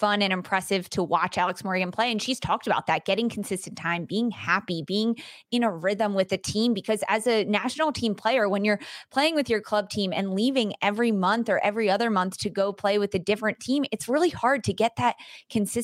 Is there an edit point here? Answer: no; 0 cuts

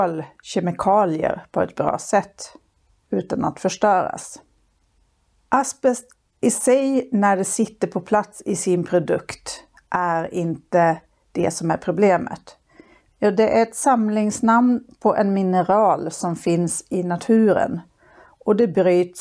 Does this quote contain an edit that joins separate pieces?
yes; 1 cut; at 13.1 s

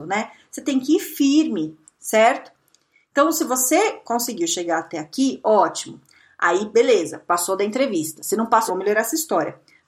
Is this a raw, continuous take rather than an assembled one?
no; 1 cut; at 8.7 s

